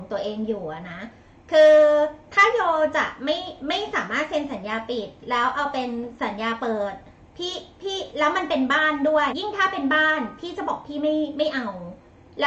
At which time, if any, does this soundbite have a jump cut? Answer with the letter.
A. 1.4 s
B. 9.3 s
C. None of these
B